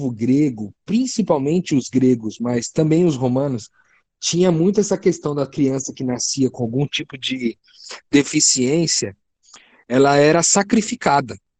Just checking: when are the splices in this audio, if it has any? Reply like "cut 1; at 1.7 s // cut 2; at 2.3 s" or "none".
none